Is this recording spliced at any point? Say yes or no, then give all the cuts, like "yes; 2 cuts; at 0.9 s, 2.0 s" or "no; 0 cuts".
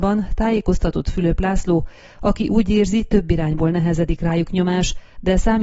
no; 0 cuts